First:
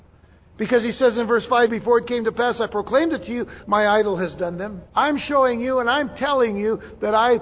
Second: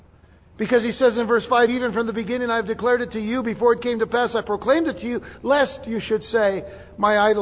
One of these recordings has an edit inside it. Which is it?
first; 3 cuts; at 1.7 s, 3.6 s, 4.9 s

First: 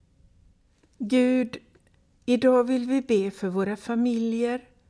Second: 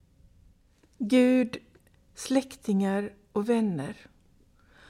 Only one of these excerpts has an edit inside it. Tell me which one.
second; 1 cut; at 2.1 s

